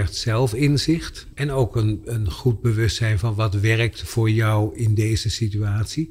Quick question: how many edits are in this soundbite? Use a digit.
1